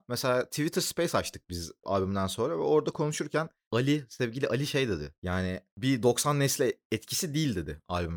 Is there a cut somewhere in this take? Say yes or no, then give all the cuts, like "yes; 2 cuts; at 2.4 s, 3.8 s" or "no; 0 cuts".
yes; 1 cut; at 1.8 s